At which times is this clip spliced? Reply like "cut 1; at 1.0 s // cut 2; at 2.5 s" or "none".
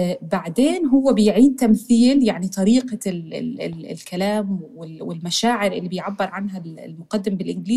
none